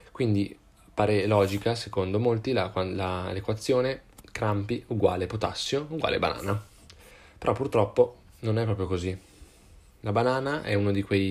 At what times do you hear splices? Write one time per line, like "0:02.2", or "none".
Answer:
none